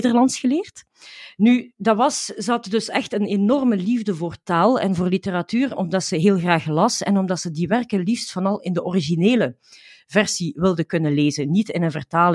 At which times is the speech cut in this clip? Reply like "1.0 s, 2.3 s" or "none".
1.7 s, 5.8 s